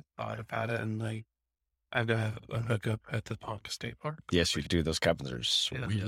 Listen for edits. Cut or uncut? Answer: cut